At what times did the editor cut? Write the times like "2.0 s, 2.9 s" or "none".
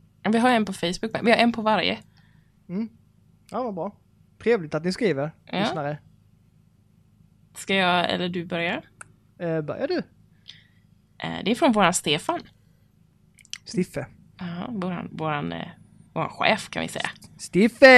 none